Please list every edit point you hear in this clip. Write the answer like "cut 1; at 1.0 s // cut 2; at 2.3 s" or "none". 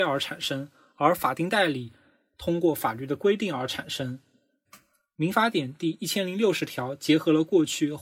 cut 1; at 4.7 s

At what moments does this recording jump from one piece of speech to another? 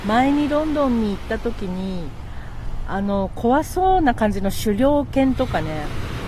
none

